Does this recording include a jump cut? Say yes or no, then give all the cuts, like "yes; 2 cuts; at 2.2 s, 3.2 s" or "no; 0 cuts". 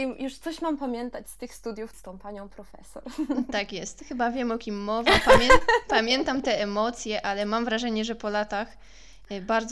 yes; 1 cut; at 1.9 s